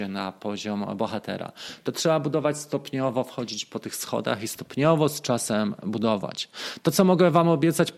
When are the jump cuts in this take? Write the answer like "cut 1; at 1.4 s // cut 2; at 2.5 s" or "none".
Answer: none